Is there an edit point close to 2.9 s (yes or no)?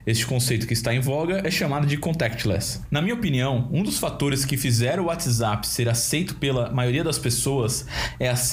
yes